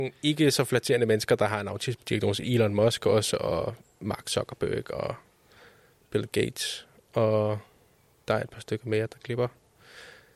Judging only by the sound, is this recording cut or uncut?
uncut